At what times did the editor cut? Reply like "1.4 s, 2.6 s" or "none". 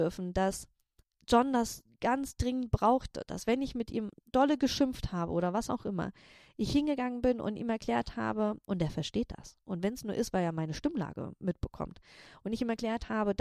none